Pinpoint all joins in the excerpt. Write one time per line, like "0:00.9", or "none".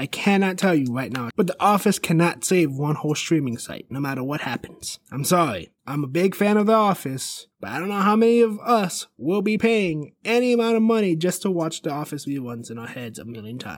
0:01.3
0:07.5